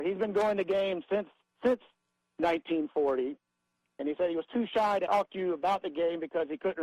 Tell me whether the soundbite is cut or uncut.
cut